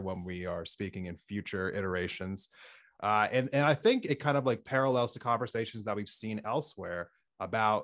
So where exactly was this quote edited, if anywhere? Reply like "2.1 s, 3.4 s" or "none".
3.0 s